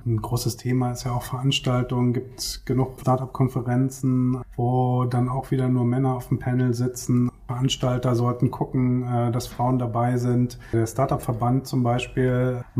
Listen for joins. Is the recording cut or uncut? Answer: uncut